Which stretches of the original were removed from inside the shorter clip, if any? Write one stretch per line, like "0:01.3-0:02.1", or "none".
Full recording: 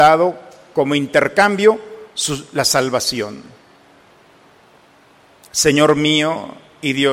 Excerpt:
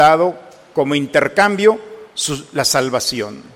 none